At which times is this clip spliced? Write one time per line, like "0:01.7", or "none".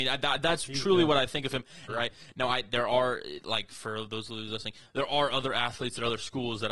0:01.9